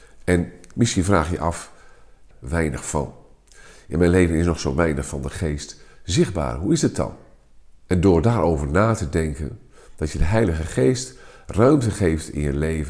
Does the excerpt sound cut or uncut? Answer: cut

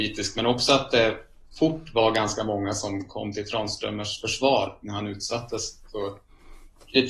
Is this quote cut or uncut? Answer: uncut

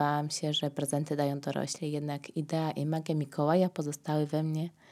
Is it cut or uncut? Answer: uncut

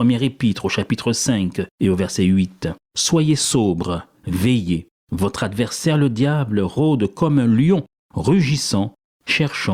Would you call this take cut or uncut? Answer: uncut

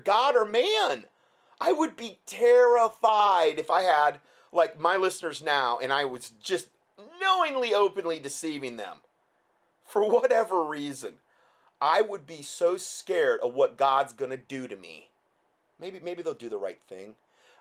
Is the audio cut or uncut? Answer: cut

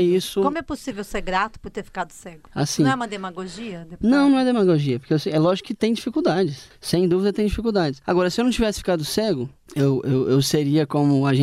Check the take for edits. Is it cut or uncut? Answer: uncut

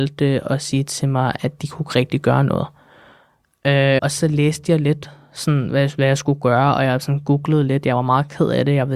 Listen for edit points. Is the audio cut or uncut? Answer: cut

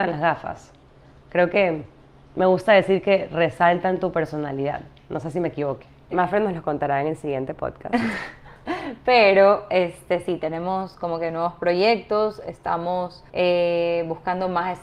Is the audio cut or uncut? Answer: cut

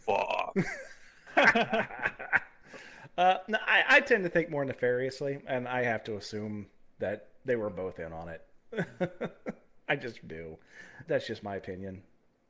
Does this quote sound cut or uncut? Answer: cut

